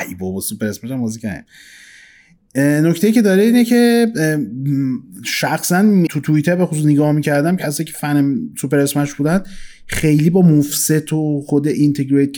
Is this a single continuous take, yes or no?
no